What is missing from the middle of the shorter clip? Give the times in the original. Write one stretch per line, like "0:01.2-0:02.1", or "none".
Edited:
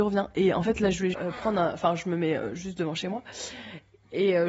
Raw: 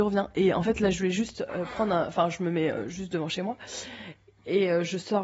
0:01.1-0:01.5

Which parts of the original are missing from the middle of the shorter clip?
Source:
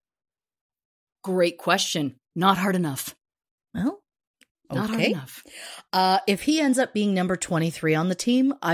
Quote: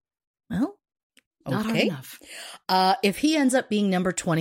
none

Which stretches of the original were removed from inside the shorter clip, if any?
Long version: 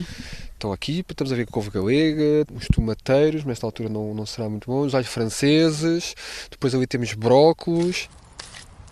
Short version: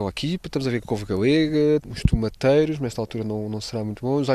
none

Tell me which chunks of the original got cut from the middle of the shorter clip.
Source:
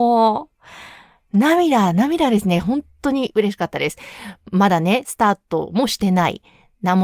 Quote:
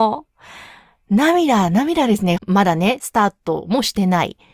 0:02.6-0:04.4

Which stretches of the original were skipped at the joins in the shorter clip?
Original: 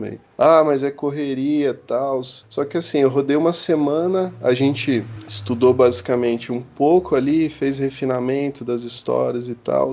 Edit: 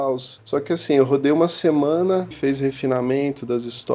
0:04.4-0:07.5

